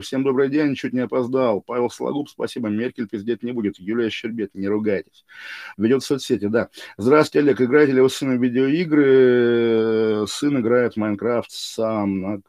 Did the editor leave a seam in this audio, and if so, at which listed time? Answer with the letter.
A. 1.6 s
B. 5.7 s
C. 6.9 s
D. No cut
B